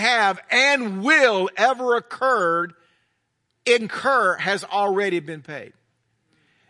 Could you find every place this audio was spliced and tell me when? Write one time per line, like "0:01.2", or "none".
none